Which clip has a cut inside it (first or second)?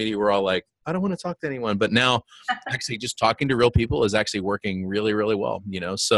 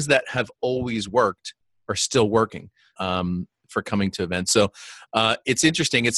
second